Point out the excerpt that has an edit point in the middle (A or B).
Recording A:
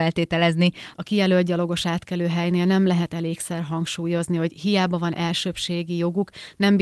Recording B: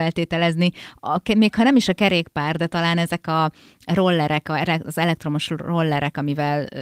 A